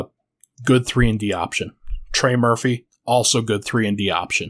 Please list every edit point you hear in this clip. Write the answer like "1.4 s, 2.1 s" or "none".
none

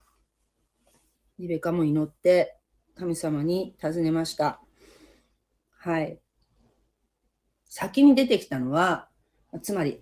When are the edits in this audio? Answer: 7.5 s

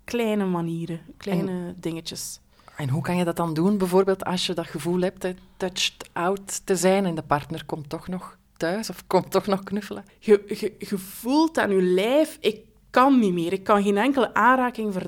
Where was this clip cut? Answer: 10.1 s

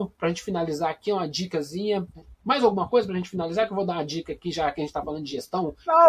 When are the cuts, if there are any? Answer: none

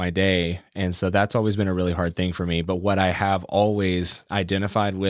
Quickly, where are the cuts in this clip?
none

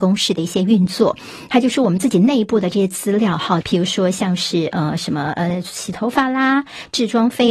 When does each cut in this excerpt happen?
3.6 s

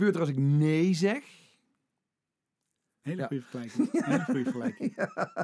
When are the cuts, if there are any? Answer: 3.0 s

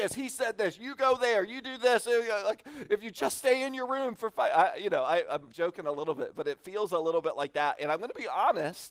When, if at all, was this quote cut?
none

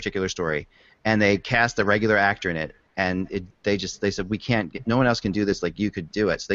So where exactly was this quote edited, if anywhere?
none

